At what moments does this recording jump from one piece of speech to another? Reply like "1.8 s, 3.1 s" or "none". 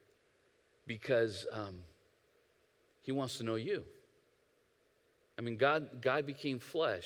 none

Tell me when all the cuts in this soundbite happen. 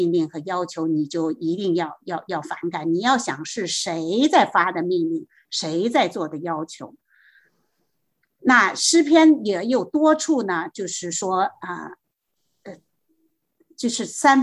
none

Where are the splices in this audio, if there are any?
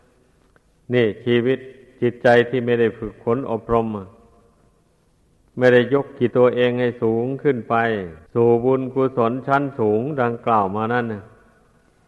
6.3 s, 8.3 s

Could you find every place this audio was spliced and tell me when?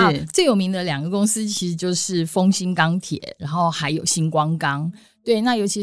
none

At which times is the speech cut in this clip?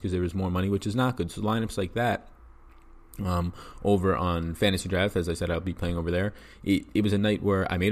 none

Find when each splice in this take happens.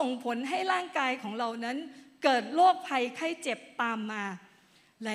none

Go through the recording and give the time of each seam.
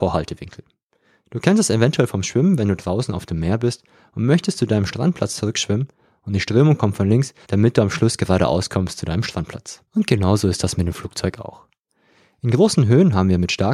7.4 s, 9.9 s

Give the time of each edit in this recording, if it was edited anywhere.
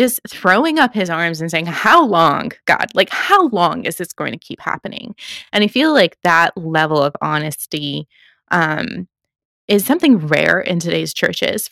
none

